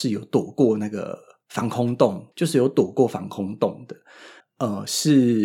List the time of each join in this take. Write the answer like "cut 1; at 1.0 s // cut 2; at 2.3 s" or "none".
cut 1; at 2.3 s // cut 2; at 4.4 s